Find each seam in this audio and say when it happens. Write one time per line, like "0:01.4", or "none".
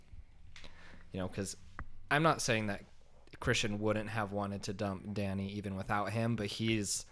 none